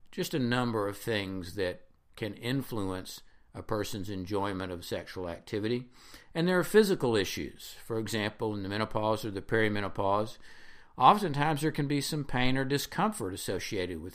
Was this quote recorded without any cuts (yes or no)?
yes